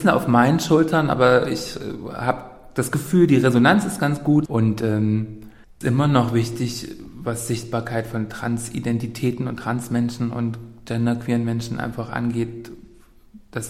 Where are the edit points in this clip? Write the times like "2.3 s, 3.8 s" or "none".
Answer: 4.5 s, 5.8 s